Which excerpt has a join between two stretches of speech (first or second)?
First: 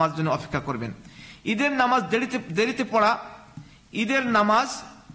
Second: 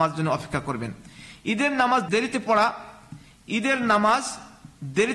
second